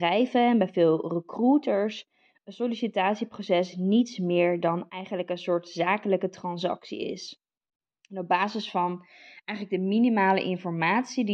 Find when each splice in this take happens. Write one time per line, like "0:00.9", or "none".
none